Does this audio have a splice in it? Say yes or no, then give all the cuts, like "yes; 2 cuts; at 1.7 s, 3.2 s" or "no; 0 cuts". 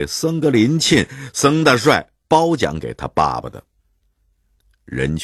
no; 0 cuts